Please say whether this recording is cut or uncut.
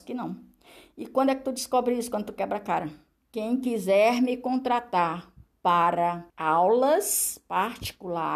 cut